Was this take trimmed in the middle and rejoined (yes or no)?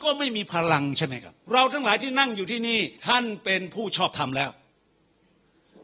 yes